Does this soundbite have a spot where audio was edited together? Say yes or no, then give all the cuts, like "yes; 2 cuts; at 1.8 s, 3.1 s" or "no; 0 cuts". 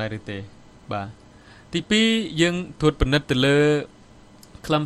no; 0 cuts